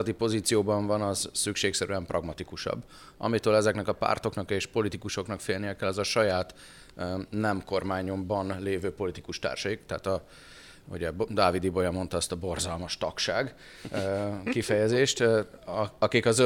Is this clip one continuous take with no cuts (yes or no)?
yes